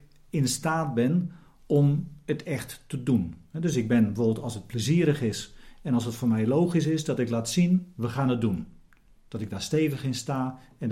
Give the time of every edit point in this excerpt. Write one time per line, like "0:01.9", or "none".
none